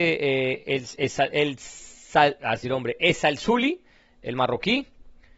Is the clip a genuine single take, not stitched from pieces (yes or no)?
no